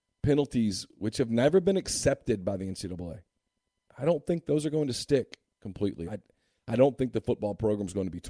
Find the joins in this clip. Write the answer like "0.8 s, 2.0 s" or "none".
6.1 s